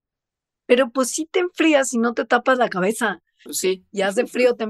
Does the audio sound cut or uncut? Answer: cut